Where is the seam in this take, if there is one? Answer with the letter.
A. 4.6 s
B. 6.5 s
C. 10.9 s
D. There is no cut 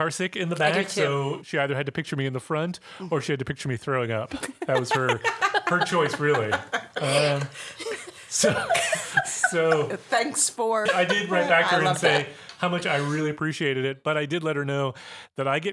C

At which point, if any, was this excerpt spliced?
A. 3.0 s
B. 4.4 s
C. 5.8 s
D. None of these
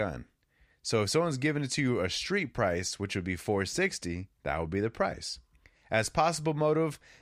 B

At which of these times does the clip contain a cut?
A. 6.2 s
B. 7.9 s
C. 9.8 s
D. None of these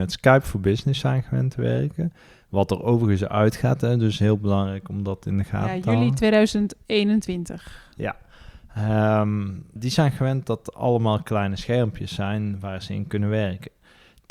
C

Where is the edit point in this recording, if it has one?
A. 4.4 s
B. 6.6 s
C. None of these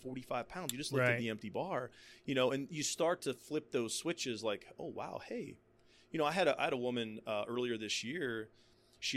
C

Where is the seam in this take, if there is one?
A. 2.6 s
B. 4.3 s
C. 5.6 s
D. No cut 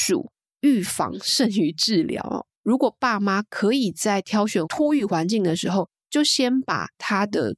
A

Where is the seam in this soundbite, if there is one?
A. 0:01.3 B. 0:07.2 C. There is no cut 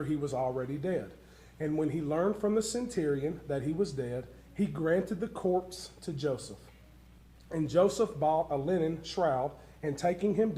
C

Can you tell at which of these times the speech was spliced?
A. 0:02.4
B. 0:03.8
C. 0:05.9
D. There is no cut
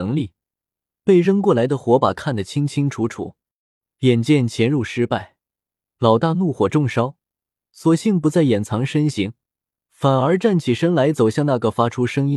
D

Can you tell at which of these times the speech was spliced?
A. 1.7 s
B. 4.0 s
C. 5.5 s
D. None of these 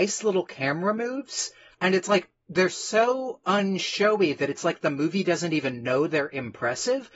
A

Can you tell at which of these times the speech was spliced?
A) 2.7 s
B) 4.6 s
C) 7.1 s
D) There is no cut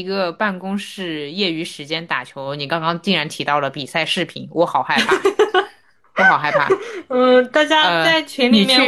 D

